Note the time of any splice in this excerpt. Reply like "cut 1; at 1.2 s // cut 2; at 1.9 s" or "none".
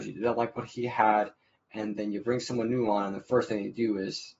none